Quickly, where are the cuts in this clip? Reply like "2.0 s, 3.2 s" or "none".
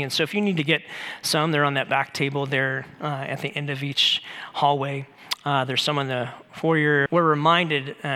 7.1 s